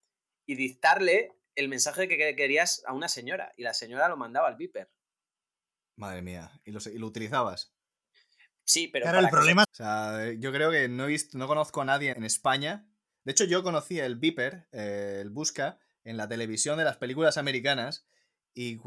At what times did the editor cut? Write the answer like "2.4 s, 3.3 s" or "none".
9.6 s, 12.1 s